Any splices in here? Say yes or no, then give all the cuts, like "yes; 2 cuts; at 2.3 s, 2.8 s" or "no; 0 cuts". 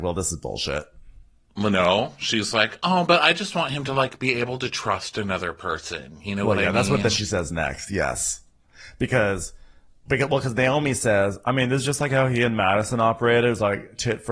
no; 0 cuts